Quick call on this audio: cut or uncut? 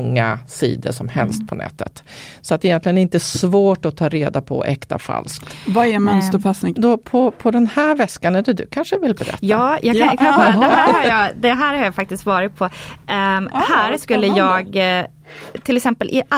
cut